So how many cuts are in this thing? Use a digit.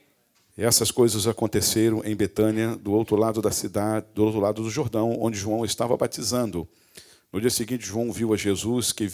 0